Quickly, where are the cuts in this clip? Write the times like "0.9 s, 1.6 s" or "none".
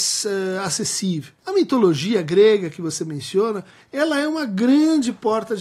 none